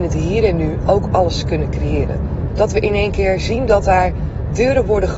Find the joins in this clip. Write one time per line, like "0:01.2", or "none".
0:02.5